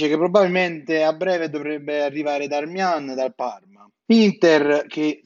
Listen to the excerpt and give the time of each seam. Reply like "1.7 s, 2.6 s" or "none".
4.1 s